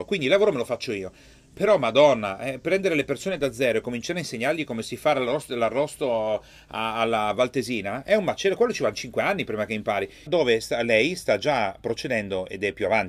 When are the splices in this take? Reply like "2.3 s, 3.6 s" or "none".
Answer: 10.3 s

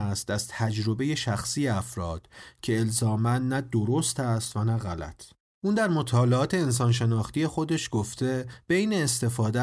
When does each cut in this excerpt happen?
none

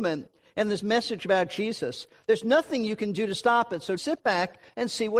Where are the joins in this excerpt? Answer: 4.0 s

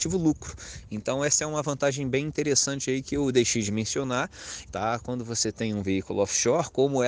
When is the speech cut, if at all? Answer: 4.7 s

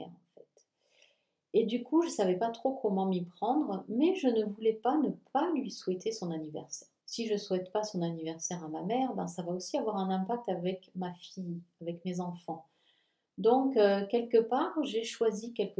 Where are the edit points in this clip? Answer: 7.0 s

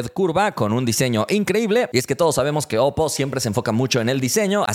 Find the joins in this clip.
none

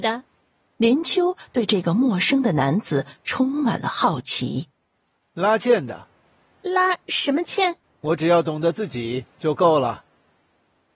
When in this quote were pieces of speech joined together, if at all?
7.8 s

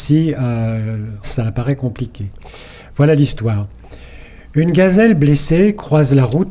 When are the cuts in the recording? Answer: 1.2 s

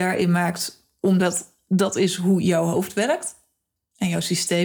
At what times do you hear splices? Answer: none

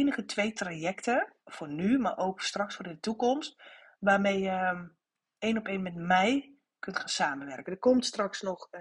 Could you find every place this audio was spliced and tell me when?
1.4 s, 7.6 s

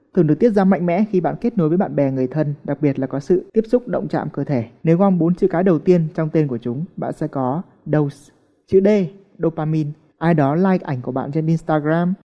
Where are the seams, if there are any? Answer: 4.8 s, 8.6 s, 10.1 s

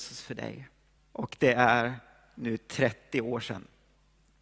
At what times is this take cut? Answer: 1.0 s

